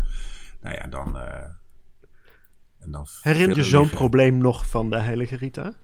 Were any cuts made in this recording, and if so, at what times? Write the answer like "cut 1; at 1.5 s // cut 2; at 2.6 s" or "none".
cut 1; at 3.5 s